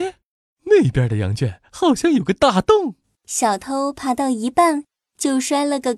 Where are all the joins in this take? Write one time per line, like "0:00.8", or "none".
0:03.2

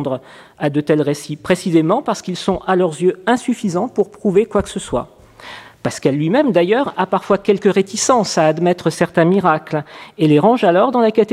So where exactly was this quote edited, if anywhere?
none

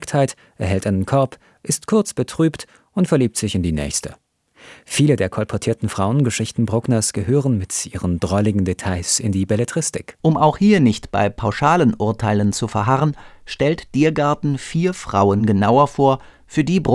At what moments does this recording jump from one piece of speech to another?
0:10.2

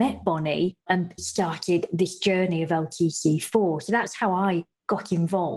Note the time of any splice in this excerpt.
0:01.2

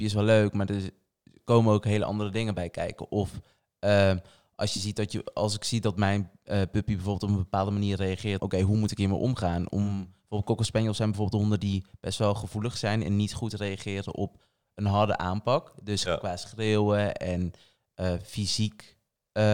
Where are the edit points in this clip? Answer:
0:08.4

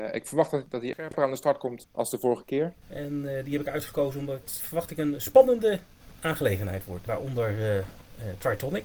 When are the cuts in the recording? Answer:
0:00.9
0:02.8
0:07.1

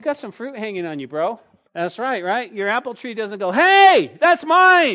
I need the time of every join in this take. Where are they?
0:01.7

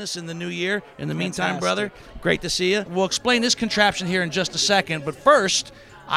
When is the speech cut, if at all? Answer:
0:02.9

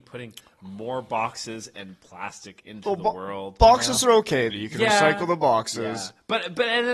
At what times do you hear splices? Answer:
0:04.5

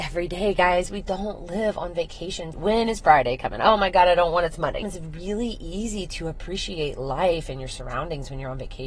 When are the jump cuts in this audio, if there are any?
0:02.5
0:04.8

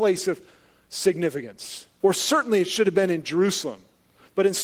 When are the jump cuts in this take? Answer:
0:02.0

